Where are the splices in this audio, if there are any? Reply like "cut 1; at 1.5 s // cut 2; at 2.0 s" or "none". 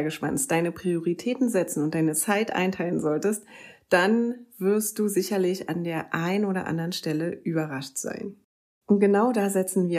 cut 1; at 8.8 s